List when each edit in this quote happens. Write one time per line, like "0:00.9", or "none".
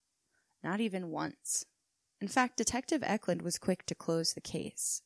none